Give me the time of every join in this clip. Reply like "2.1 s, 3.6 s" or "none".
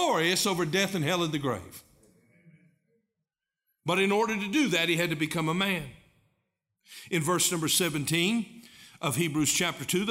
none